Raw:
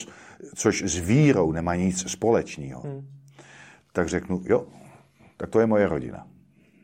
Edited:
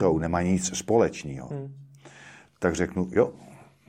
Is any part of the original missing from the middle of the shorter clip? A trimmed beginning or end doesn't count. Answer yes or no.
no